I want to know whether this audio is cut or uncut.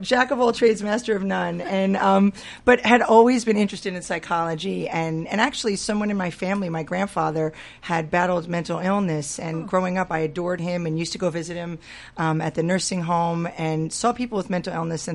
uncut